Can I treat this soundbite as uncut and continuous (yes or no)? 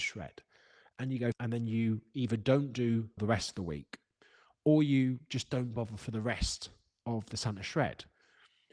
no